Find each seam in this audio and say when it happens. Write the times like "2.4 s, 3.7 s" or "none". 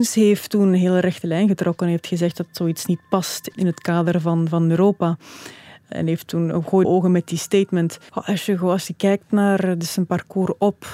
6.8 s, 8.1 s